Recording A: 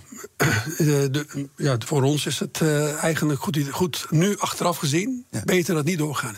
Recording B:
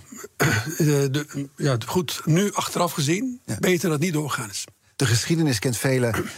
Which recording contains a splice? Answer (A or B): B